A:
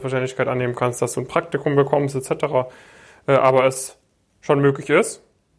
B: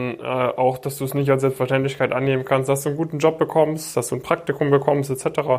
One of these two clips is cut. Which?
B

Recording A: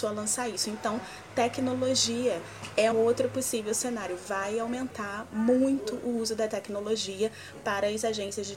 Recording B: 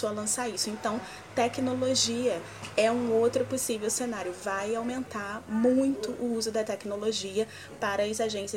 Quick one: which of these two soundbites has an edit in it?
A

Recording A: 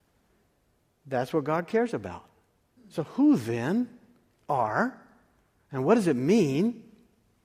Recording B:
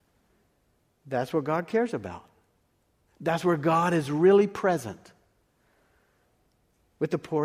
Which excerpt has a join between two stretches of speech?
A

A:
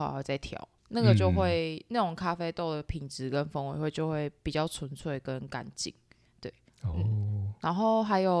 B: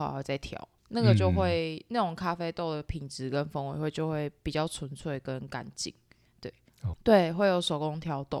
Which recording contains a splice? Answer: B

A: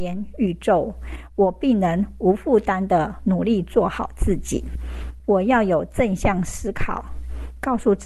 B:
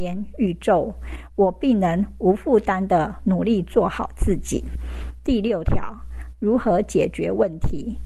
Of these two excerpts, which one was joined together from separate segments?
A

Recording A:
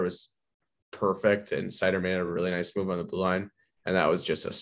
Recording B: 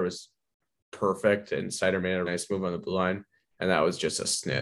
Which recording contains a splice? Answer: B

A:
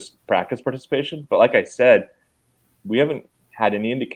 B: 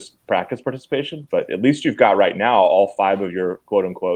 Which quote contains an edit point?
B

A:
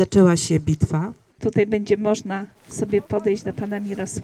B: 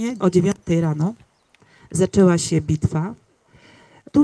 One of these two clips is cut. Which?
A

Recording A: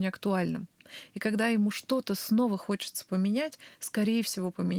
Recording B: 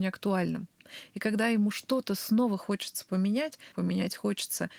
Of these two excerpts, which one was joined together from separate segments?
B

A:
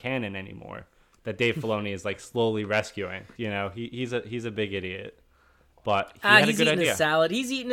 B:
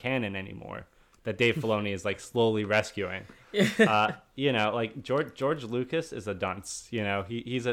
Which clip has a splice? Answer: A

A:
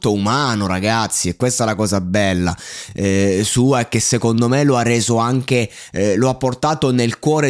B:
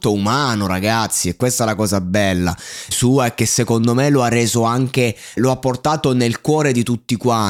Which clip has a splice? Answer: B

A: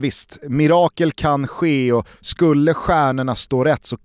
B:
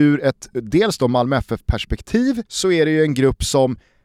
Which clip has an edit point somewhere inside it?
B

